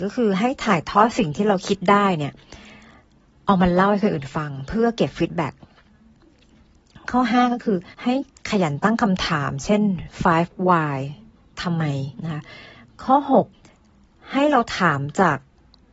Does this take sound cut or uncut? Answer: cut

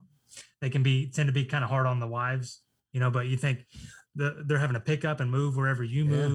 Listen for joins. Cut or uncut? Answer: uncut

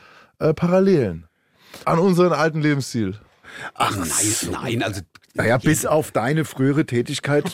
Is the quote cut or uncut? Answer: cut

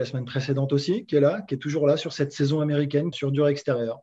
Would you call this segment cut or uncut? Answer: cut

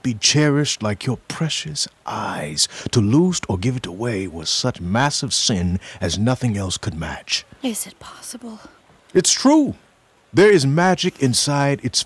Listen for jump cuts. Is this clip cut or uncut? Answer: uncut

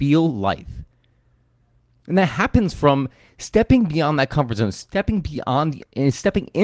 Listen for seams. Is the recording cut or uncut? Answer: uncut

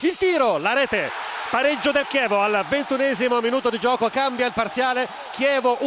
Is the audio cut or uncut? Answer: uncut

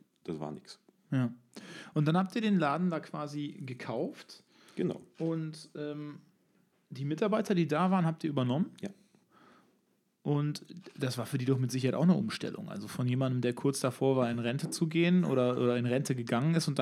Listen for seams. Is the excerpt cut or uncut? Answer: uncut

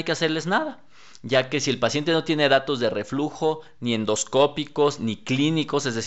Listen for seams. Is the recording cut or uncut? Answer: uncut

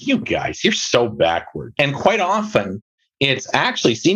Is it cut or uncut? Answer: cut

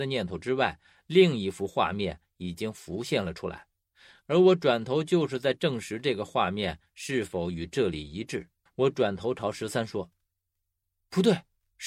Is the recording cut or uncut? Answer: cut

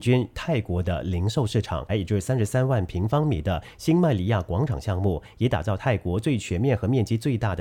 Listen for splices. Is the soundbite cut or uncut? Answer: cut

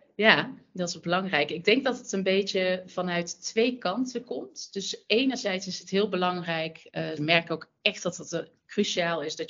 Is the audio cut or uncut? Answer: cut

